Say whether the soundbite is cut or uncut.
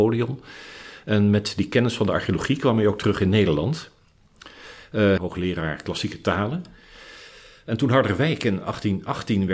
cut